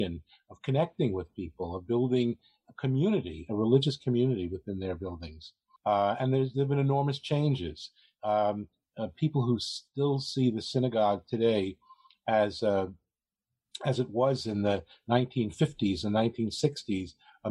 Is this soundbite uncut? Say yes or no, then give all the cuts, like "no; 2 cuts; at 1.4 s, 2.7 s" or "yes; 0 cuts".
no; 1 cut; at 5.8 s